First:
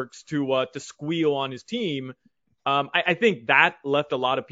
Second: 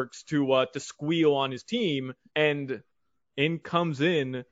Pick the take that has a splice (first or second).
second